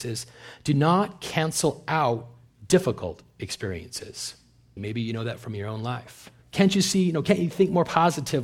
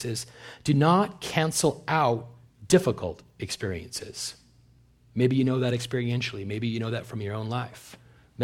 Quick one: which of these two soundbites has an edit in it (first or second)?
first